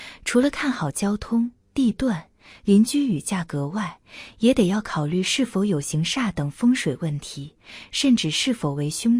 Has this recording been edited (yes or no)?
yes